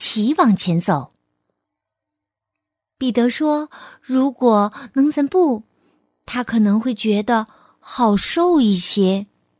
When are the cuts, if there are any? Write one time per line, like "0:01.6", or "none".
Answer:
0:01.6
0:05.1